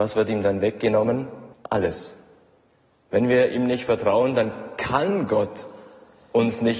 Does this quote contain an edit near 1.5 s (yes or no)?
yes